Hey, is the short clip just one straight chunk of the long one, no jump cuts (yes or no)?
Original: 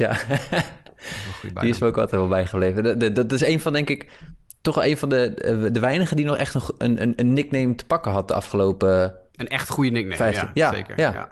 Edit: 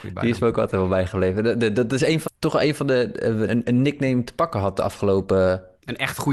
no